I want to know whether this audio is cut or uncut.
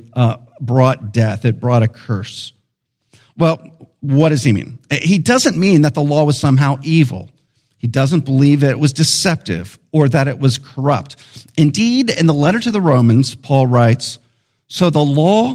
uncut